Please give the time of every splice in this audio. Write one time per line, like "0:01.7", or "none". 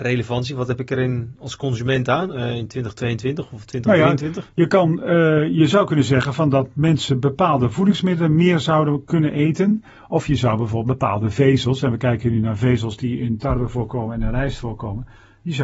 none